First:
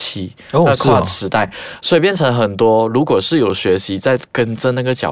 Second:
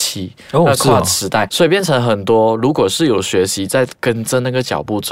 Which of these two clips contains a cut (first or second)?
second